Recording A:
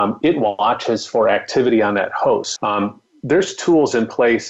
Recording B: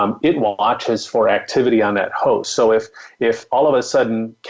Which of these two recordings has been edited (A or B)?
A